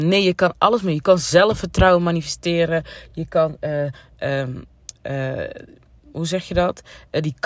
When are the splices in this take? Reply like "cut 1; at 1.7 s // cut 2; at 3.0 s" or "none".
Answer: none